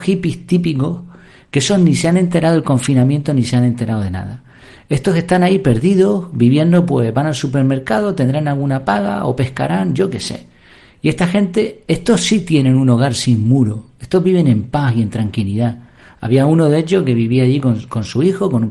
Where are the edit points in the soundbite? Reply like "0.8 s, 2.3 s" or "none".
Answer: none